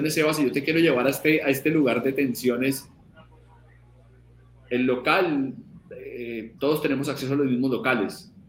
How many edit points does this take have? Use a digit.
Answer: 1